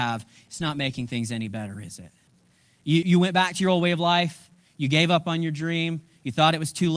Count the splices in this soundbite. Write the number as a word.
one